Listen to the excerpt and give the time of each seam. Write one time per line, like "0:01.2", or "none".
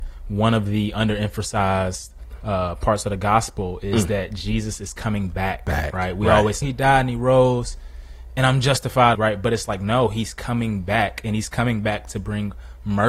0:06.6
0:09.1

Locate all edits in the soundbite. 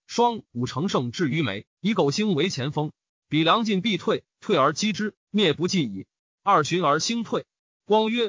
0:01.3
0:03.2

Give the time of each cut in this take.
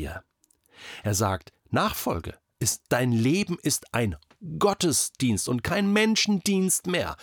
0:01.6
0:02.9

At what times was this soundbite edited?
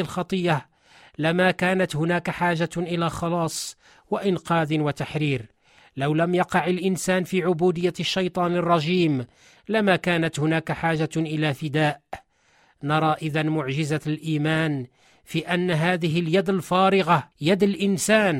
0:17.3

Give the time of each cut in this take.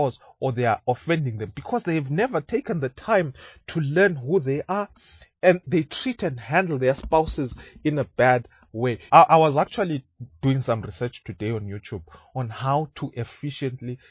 0:05.6
0:09.1

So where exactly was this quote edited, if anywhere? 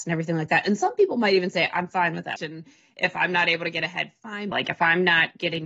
0:02.4
0:04.5

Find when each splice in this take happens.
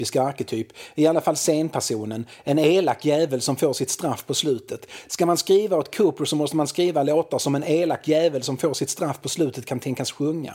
none

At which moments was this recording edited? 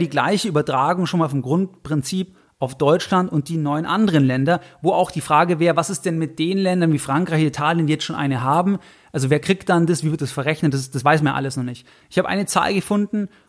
0:12.0

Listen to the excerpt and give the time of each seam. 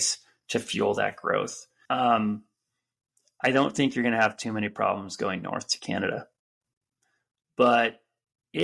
0:01.9

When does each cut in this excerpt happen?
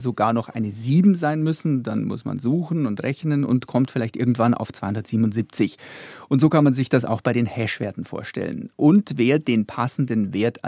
none

